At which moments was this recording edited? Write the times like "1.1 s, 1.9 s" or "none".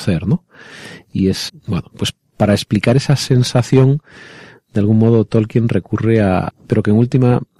1.5 s, 6.5 s